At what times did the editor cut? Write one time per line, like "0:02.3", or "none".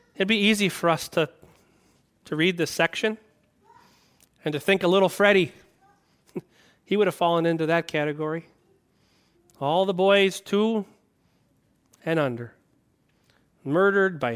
none